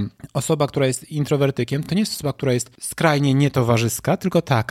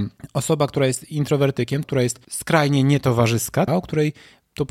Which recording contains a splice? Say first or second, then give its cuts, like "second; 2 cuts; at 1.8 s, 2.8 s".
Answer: second; 2 cuts; at 1.8 s, 3.7 s